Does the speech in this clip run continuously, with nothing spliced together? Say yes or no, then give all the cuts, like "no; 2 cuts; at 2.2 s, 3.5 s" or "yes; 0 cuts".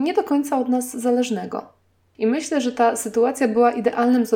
no; 1 cut; at 2.1 s